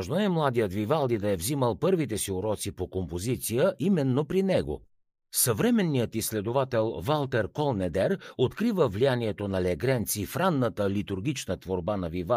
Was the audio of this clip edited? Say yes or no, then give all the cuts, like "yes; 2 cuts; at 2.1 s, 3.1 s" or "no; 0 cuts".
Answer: no; 0 cuts